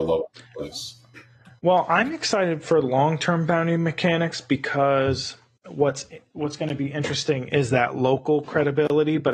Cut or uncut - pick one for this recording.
uncut